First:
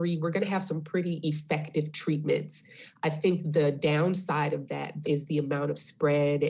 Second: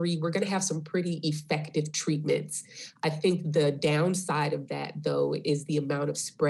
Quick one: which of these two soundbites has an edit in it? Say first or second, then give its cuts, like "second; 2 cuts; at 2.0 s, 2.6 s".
first; 1 cut; at 5.0 s